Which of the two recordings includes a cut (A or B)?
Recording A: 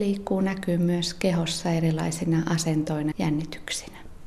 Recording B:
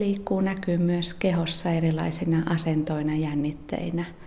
A